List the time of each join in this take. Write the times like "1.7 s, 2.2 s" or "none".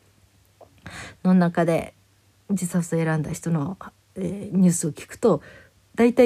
none